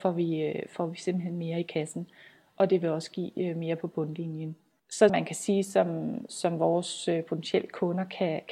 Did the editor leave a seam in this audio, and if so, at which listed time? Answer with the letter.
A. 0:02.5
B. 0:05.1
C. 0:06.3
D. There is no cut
B